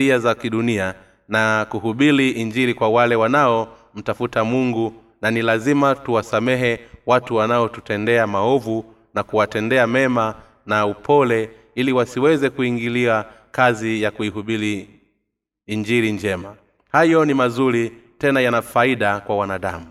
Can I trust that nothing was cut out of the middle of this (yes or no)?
yes